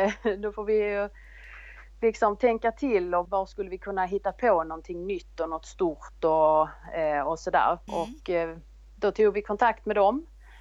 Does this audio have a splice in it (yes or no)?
yes